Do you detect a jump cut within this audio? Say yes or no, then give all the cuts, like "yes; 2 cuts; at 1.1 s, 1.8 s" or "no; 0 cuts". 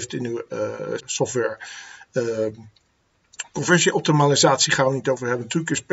yes; 1 cut; at 1.0 s